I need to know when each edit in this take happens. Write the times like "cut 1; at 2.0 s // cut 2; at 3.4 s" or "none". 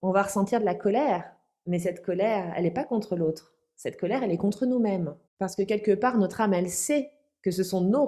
none